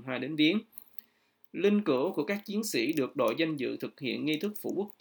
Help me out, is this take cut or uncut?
uncut